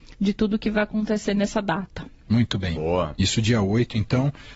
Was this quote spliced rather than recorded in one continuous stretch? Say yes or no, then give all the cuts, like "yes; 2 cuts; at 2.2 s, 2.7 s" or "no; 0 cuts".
no; 0 cuts